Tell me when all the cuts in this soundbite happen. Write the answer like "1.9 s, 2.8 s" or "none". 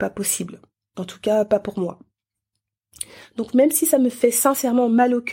none